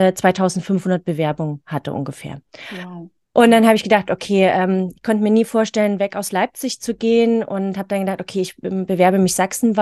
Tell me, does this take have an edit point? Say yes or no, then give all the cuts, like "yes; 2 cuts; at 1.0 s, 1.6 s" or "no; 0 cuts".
no; 0 cuts